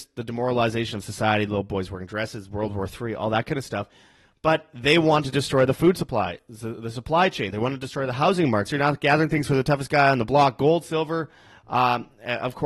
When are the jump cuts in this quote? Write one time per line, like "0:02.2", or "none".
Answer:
0:07.5
0:08.7

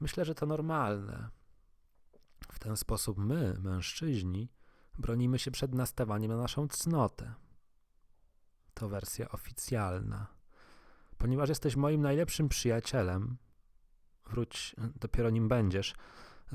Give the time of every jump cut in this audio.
none

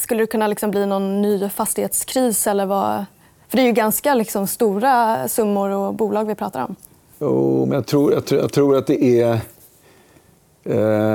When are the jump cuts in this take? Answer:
none

